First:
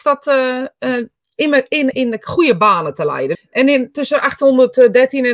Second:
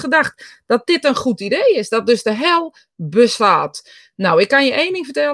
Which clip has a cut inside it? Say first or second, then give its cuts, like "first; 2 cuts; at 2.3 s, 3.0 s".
first; 2 cuts; at 1.9 s, 3.3 s